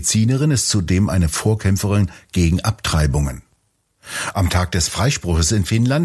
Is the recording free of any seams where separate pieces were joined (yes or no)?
yes